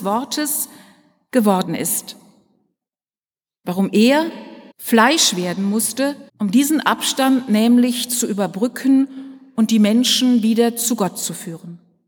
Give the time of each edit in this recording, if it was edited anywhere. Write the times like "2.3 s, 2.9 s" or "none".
4.7 s, 6.3 s